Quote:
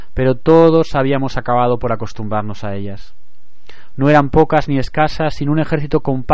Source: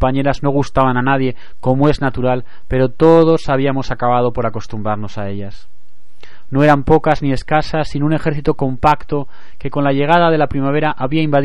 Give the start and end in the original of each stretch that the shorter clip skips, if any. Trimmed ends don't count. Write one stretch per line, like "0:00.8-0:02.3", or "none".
none